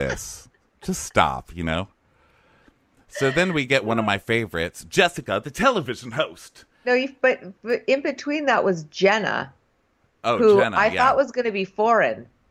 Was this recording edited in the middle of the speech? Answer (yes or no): no